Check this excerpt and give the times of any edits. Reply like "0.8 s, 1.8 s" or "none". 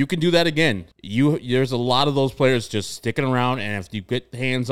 0.9 s